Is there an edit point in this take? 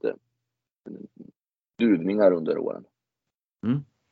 no; 0 cuts

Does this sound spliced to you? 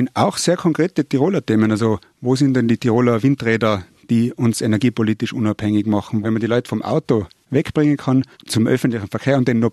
yes; 2 cuts; at 6.2 s, 8.3 s

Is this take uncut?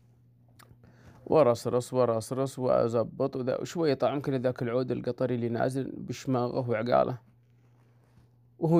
yes; 0 cuts

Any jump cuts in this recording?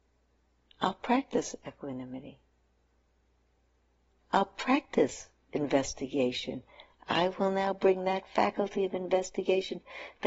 no; 0 cuts

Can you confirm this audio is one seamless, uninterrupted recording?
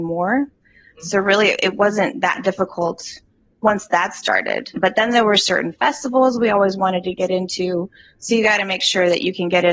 yes; 0 cuts

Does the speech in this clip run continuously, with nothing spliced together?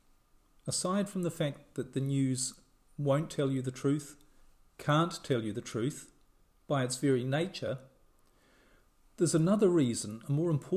yes; 0 cuts

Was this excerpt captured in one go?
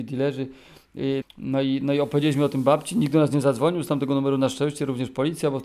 no; 1 cut; at 1.2 s

